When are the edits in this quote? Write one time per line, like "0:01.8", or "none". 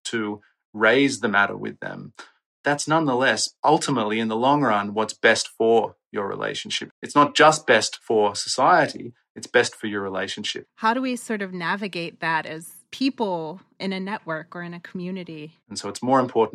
0:06.9
0:10.6
0:15.6